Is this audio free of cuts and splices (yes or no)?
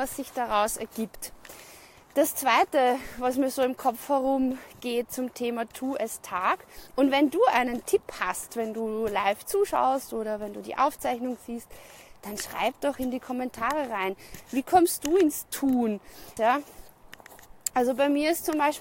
no